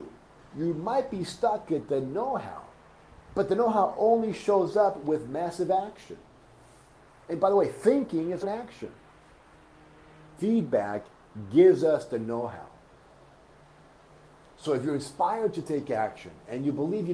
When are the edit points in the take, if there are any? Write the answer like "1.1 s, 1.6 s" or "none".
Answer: 8.4 s, 10.4 s